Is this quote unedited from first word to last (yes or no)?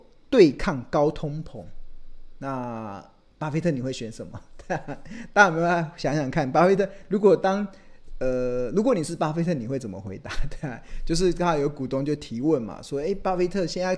yes